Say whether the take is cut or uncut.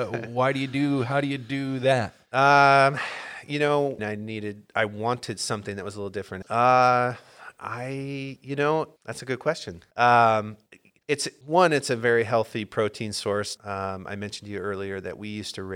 cut